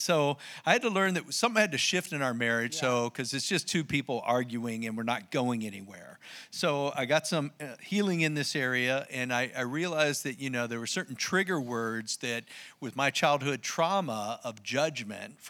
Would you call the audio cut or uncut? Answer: uncut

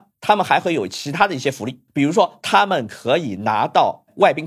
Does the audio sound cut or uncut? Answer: cut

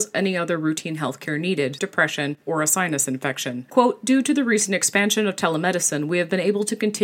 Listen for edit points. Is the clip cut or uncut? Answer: cut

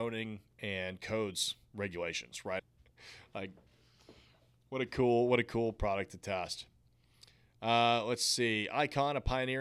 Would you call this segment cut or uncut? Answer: cut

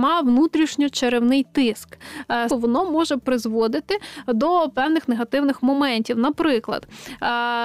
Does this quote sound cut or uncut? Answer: cut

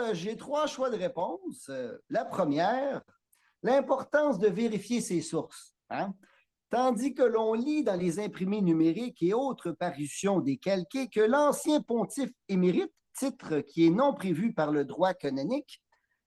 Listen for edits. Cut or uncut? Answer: uncut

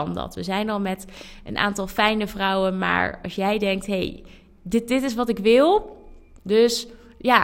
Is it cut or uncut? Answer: cut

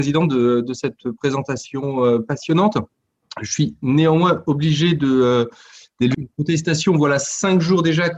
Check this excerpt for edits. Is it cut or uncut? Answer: cut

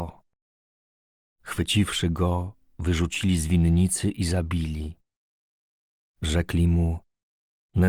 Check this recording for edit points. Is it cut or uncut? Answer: cut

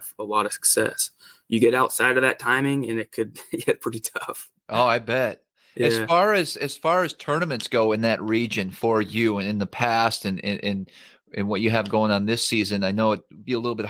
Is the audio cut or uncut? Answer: uncut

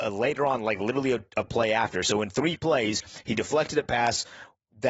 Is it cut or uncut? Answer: uncut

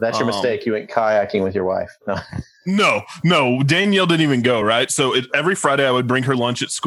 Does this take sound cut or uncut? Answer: uncut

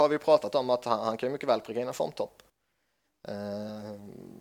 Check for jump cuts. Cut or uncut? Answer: uncut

